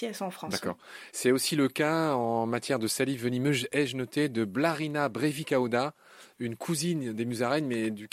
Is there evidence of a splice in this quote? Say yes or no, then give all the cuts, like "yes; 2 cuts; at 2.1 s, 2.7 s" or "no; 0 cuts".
no; 0 cuts